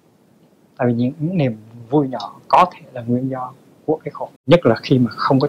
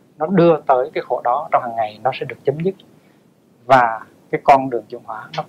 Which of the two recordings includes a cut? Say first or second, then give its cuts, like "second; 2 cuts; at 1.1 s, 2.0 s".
first; 1 cut; at 4.4 s